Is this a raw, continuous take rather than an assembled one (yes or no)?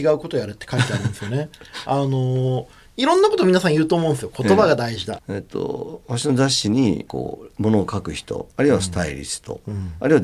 no